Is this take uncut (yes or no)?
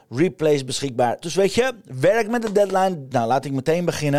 no